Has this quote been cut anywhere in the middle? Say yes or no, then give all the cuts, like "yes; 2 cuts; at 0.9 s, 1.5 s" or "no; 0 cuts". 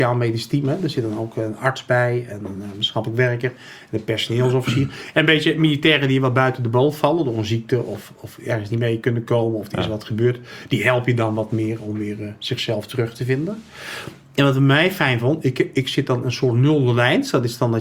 no; 0 cuts